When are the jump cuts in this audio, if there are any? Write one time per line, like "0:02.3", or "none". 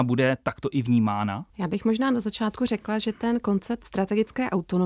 0:01.5